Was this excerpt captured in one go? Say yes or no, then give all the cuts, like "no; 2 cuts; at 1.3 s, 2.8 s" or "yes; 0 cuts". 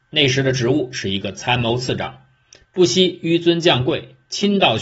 yes; 0 cuts